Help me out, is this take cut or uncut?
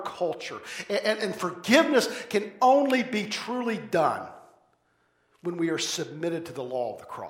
uncut